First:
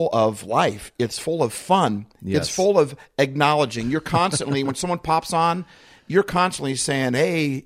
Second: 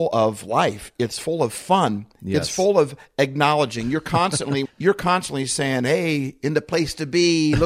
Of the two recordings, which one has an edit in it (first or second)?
second